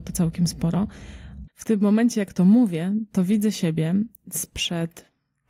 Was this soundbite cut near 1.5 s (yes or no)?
yes